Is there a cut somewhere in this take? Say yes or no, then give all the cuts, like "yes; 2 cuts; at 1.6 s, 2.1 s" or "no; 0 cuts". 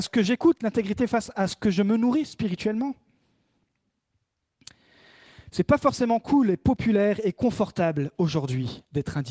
no; 0 cuts